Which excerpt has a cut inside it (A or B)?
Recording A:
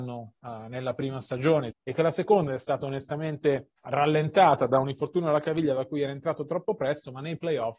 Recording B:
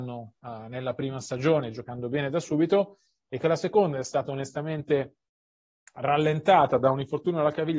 A